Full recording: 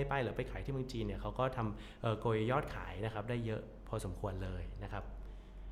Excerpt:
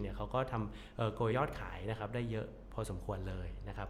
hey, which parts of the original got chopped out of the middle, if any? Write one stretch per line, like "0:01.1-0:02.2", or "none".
0:02.4-0:02.5